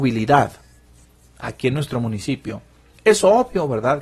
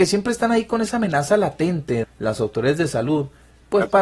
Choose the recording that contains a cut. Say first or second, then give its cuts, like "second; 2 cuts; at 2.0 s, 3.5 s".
second; 1 cut; at 2.0 s